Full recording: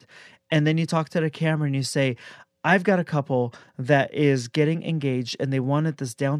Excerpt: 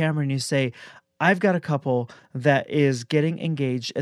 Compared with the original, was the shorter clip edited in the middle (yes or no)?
no